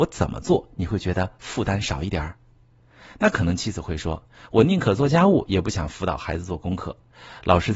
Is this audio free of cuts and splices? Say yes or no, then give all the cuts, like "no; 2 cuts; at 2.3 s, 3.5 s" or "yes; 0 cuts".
yes; 0 cuts